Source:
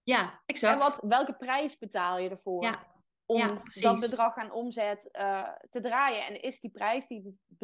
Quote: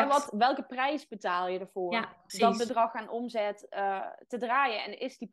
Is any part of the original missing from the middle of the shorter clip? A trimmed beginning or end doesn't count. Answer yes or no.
yes